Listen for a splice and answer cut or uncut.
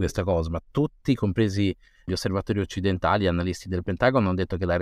cut